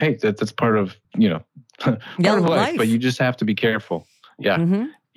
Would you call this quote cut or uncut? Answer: cut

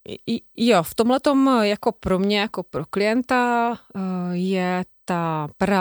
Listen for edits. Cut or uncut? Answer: uncut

